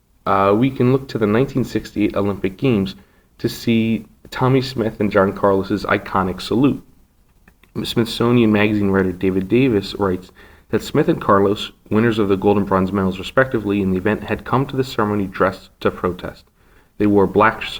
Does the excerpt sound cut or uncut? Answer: uncut